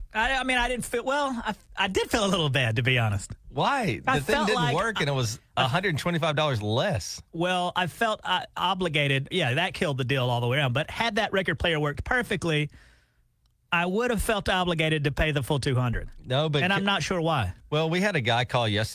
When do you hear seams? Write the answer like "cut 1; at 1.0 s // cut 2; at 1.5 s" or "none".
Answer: cut 1; at 9.3 s